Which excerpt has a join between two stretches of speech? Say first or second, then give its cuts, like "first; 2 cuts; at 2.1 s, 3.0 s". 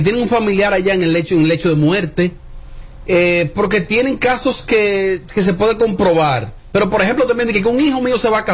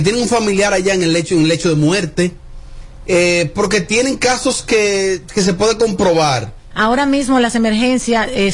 second; 1 cut; at 6.7 s